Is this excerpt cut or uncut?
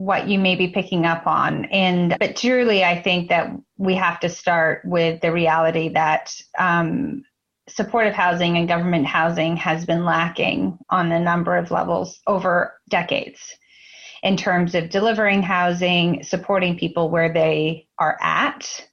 cut